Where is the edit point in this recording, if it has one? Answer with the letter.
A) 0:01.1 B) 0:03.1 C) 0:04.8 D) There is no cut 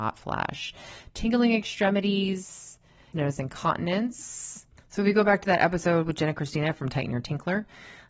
B